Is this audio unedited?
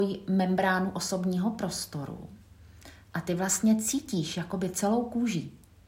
yes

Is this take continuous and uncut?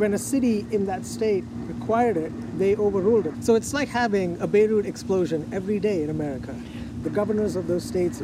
no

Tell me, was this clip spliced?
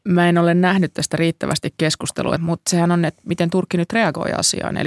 yes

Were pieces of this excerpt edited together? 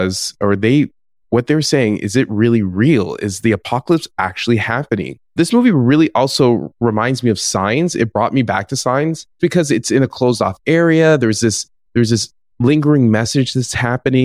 yes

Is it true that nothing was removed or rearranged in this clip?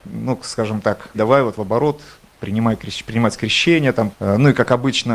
no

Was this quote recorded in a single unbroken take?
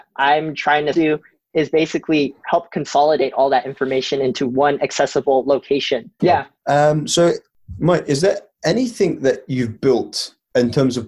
no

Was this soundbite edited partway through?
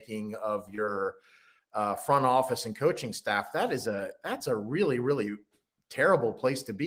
no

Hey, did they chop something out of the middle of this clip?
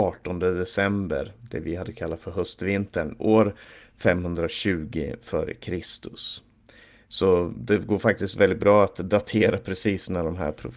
no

